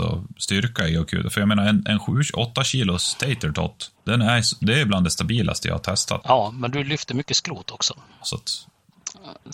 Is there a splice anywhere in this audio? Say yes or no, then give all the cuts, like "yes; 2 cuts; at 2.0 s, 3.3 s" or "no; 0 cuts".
yes; 3 cuts; at 3.9 s, 6.2 s, 8.2 s